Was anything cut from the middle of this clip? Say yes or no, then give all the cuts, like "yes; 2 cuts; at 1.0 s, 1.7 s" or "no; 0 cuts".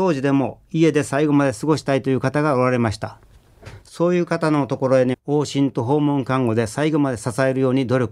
yes; 1 cut; at 5.1 s